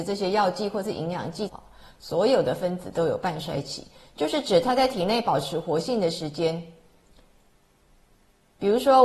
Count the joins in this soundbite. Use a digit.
1